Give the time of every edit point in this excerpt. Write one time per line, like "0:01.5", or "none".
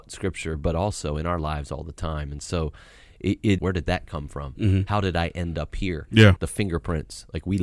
0:03.6
0:06.4